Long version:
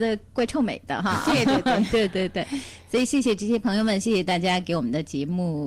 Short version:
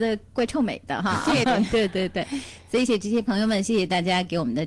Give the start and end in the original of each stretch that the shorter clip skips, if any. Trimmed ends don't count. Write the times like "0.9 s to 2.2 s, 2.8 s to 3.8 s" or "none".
1.4 s to 1.6 s, 3.1 s to 3.2 s